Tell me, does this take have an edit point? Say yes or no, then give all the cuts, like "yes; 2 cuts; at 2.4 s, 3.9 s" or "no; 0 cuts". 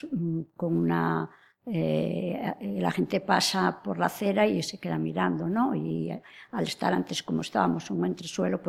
no; 0 cuts